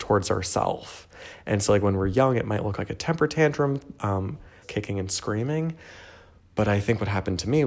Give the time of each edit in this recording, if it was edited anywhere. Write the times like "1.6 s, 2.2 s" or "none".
4.6 s